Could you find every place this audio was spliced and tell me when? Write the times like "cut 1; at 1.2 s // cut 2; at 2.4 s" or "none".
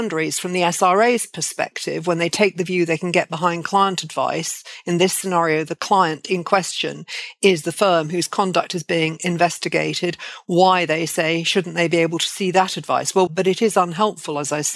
cut 1; at 13.3 s

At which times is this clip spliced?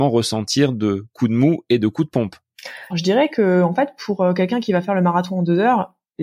cut 1; at 2.9 s

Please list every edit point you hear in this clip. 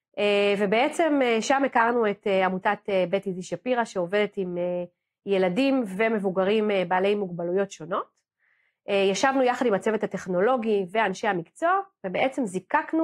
none

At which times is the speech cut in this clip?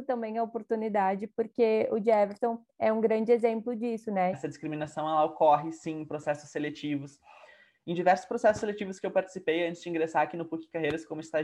cut 1; at 4.3 s

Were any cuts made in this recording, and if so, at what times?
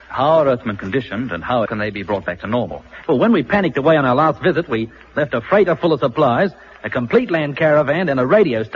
cut 1; at 1.7 s // cut 2; at 3.0 s

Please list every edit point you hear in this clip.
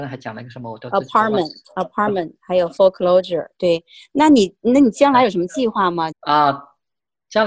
cut 1; at 6.1 s

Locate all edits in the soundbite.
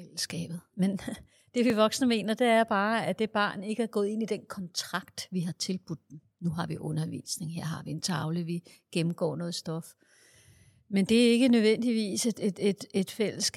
none

